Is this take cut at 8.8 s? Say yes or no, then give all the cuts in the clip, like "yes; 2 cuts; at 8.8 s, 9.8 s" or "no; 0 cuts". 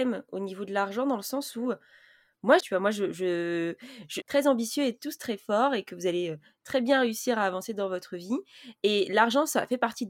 no; 2 cuts; at 2.6 s, 4.2 s